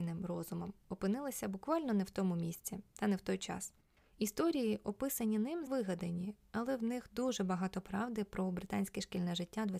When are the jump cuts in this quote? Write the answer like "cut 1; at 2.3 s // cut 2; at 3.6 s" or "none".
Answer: cut 1; at 4.0 s // cut 2; at 5.7 s